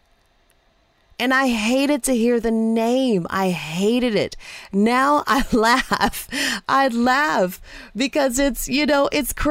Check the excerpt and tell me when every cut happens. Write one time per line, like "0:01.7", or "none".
none